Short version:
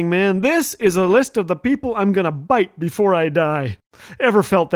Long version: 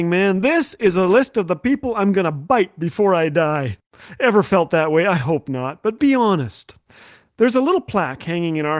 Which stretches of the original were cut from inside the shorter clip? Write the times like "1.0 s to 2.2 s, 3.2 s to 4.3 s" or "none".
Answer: none